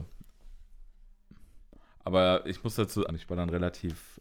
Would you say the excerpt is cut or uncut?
cut